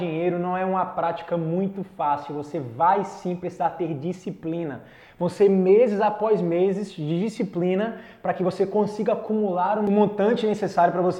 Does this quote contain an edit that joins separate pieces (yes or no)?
no